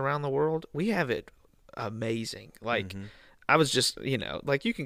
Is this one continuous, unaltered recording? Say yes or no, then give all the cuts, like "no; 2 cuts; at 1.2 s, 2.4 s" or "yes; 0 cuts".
yes; 0 cuts